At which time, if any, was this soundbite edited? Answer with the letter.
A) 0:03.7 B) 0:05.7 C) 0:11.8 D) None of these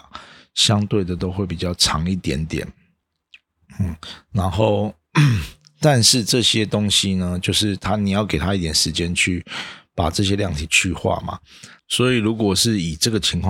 C